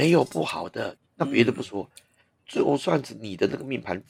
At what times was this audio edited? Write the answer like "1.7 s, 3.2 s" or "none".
1.0 s